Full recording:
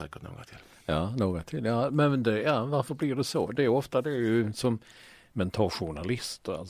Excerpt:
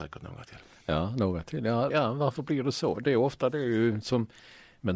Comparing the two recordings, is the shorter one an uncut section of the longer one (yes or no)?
no